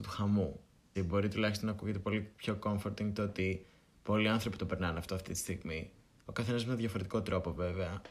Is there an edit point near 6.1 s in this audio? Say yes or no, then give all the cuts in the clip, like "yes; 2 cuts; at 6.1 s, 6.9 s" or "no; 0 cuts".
no; 1 cut; at 0.9 s